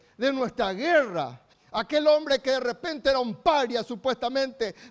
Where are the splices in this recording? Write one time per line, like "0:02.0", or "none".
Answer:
0:01.5